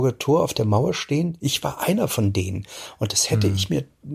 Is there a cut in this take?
no; 0 cuts

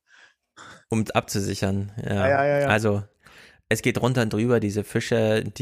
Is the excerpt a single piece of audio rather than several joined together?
yes; 0 cuts

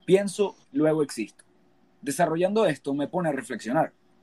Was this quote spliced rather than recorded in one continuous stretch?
no; 0 cuts

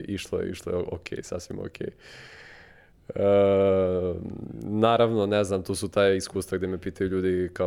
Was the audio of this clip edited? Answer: no; 0 cuts

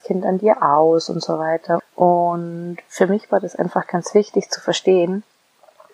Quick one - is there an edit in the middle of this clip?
yes; 1 cut; at 1.8 s

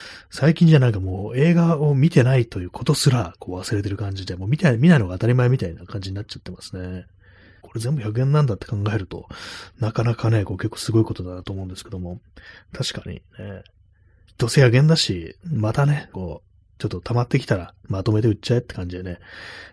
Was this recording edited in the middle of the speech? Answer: yes; 3 cuts; at 7.6 s, 14.3 s, 16.1 s

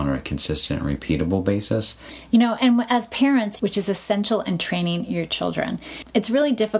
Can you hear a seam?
yes; 1 cut; at 3.6 s

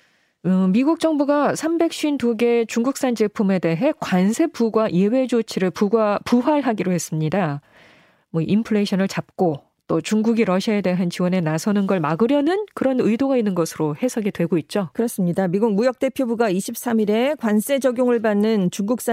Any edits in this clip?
no; 0 cuts

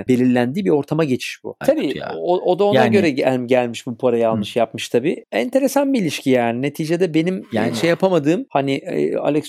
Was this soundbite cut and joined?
yes; 1 cut; at 1.6 s

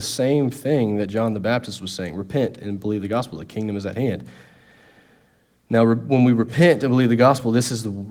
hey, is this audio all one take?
yes; 0 cuts

